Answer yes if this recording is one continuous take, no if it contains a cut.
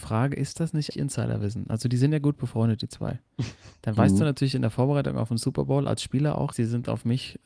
no